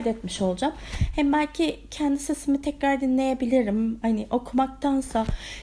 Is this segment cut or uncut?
uncut